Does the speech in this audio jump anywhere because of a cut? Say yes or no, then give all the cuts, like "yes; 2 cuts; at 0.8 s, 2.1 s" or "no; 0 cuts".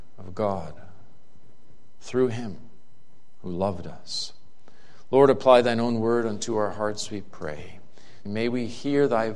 yes; 1 cut; at 8.3 s